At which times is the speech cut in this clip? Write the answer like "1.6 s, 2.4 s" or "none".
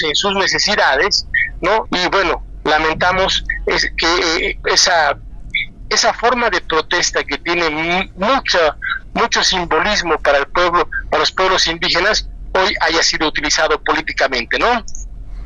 1.9 s, 4.6 s